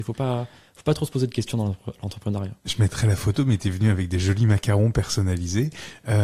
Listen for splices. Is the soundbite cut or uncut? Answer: uncut